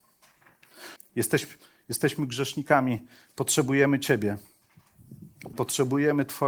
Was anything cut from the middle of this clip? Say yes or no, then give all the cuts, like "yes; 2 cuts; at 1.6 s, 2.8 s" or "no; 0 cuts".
yes; 2 cuts; at 1.0 s, 5.5 s